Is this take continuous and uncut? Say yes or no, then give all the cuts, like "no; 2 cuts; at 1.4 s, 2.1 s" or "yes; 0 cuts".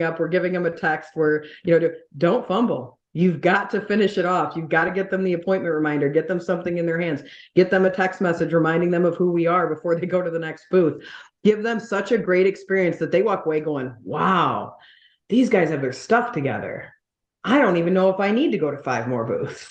yes; 0 cuts